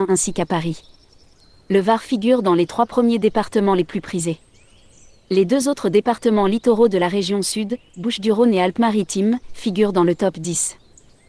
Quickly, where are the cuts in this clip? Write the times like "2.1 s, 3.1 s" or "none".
none